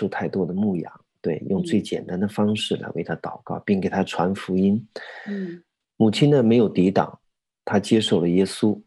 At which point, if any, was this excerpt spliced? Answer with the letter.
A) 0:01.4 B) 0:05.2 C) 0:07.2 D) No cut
D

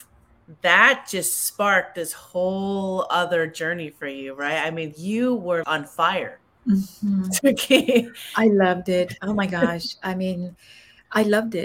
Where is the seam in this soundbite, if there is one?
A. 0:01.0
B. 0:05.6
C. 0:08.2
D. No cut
B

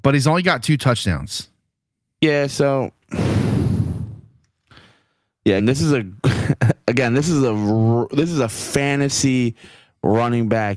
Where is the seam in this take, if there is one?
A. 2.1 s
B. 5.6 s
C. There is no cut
B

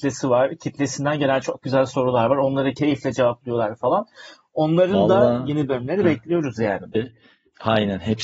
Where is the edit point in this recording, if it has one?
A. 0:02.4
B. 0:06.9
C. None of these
B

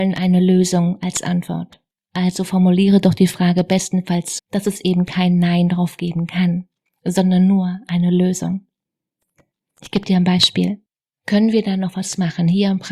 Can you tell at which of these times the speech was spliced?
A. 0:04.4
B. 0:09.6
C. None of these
A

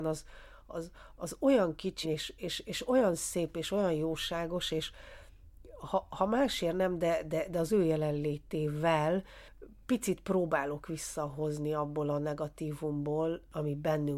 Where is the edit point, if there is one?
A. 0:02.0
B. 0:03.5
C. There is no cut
A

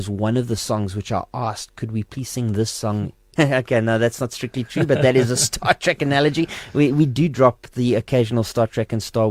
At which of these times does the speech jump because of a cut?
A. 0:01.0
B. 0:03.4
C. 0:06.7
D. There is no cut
B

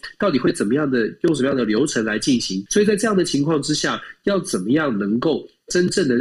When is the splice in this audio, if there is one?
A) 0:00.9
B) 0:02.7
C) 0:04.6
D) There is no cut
B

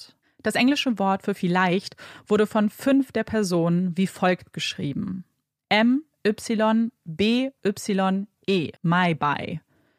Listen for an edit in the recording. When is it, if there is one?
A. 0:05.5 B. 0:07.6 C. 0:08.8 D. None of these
C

